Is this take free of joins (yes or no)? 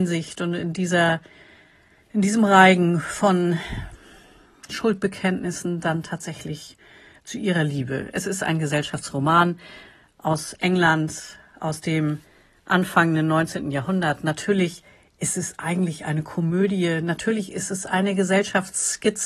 yes